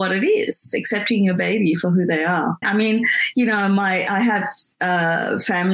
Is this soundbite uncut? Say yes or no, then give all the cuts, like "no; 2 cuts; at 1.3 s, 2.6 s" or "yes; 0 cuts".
no; 1 cut; at 2.6 s